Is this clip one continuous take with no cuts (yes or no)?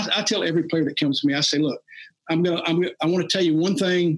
yes